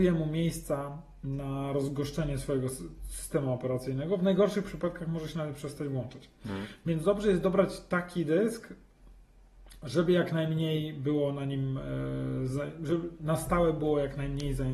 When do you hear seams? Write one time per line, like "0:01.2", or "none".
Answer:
none